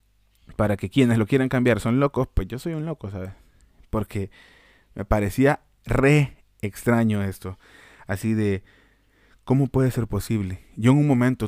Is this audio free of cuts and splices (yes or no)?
yes